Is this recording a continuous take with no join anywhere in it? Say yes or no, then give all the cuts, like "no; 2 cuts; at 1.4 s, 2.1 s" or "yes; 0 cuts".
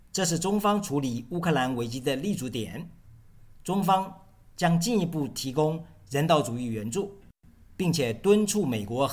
yes; 0 cuts